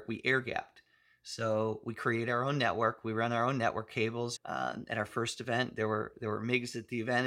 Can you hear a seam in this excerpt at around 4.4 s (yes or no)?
yes